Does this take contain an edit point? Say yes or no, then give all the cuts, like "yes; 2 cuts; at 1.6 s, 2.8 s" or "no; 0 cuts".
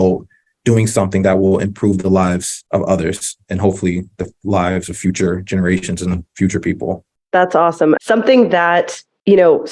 yes; 1 cut; at 8.0 s